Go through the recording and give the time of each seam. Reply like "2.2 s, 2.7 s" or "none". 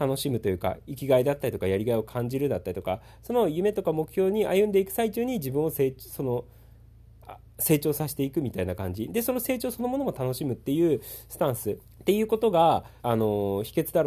11.8 s, 13.0 s